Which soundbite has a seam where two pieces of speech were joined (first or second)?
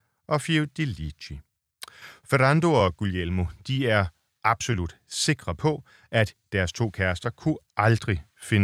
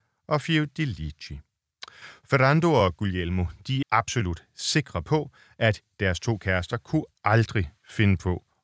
second